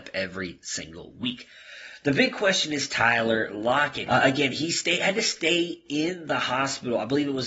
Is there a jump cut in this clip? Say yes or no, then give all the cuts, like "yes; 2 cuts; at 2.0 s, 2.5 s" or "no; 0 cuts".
yes; 1 cut; at 4.1 s